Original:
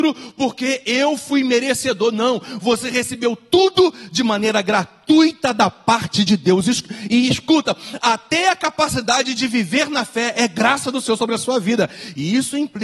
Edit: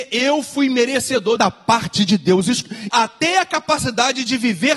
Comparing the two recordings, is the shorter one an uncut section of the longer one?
no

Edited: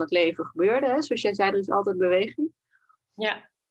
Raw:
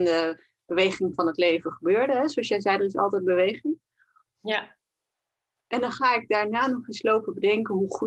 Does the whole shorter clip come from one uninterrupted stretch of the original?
yes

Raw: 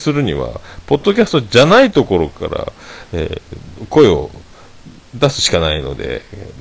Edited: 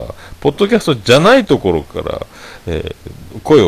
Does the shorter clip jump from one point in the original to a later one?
no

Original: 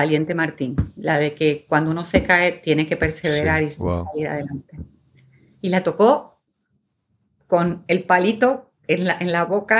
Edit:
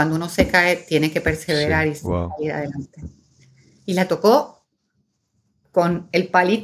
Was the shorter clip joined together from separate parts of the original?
no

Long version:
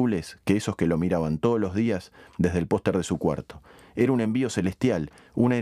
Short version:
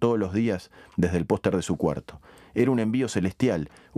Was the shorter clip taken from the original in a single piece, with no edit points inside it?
yes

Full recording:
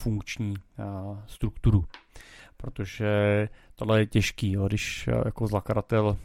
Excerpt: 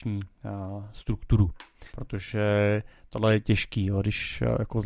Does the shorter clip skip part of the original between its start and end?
yes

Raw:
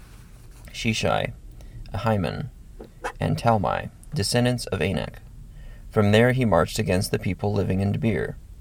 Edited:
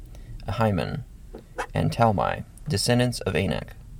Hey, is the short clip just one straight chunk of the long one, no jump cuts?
yes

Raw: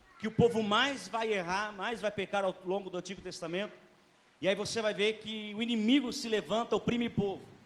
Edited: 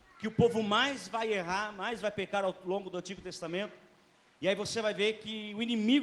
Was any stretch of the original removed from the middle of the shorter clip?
no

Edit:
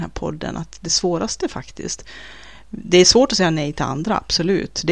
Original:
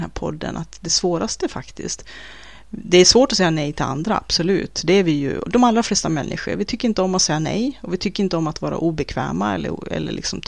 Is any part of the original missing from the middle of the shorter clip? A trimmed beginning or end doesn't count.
no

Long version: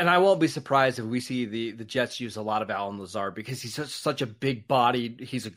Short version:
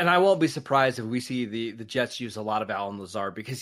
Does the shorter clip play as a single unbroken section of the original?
yes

